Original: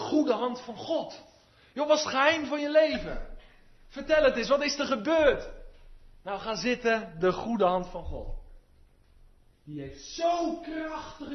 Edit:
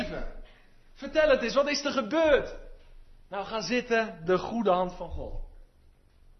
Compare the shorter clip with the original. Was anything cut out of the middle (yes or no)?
no